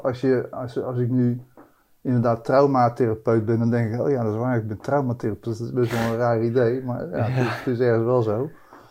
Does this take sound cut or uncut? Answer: cut